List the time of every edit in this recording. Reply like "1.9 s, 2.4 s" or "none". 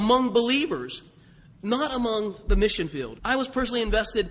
3.2 s